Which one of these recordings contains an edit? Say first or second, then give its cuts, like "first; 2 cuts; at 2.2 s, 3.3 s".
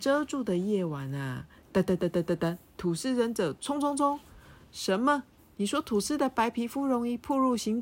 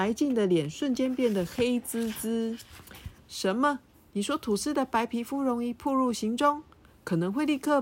second; 1 cut; at 3.2 s